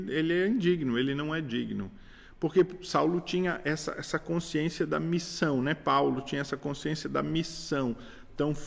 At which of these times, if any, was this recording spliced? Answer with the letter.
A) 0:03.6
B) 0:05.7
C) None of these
C